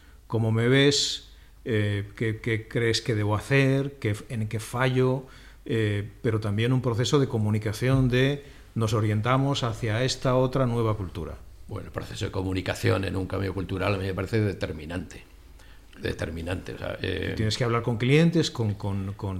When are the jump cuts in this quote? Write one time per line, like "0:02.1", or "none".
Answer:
none